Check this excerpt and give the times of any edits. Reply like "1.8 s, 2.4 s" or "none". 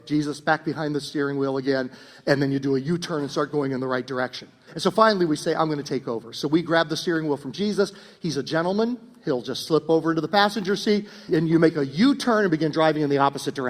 4.7 s, 11.3 s